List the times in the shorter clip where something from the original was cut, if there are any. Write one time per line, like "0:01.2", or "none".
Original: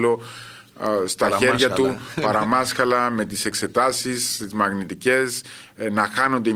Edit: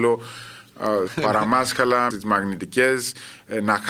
0:01.1
0:02.1